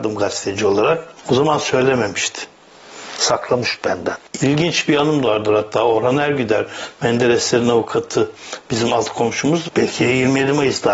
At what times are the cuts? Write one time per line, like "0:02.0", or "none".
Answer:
0:09.7

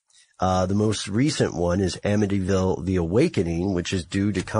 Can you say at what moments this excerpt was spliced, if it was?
none

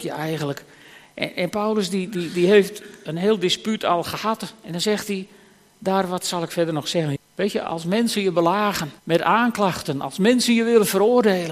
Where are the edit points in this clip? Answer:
0:07.2
0:09.0

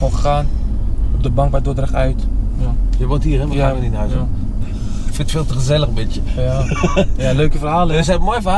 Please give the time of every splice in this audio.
none

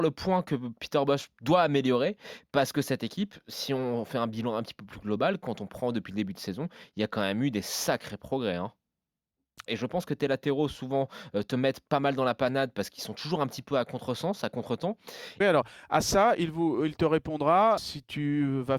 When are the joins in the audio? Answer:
0:09.7
0:15.4
0:17.8

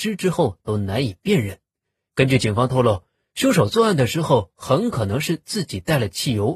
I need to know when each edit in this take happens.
none

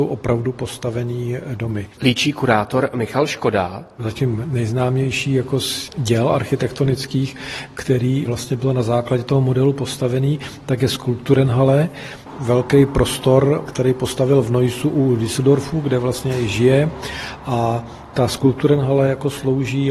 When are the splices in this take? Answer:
none

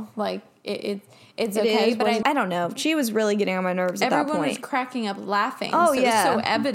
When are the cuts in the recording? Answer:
0:02.2

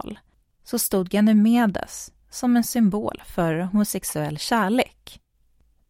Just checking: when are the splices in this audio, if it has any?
none

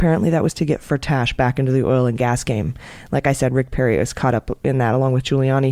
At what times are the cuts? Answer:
none

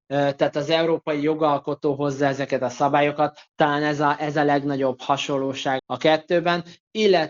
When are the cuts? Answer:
0:05.8

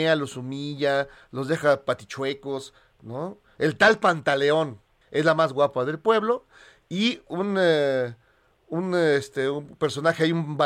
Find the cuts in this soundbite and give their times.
0:05.0

